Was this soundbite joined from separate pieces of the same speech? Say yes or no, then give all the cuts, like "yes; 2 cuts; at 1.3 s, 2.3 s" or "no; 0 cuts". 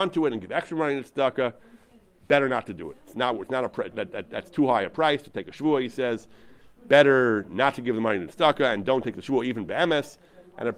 yes; 1 cut; at 3.9 s